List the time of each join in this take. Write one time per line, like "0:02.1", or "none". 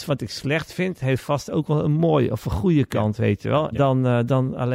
0:03.7